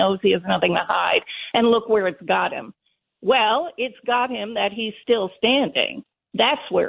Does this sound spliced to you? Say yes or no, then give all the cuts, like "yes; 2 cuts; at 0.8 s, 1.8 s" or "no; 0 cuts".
no; 0 cuts